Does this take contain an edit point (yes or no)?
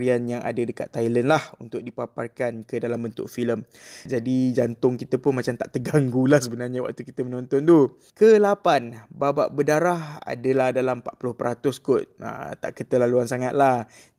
yes